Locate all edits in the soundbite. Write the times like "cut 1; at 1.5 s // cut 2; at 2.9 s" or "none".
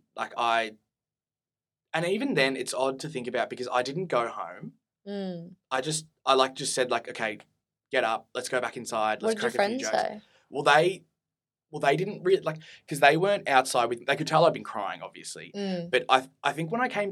cut 1; at 7.8 s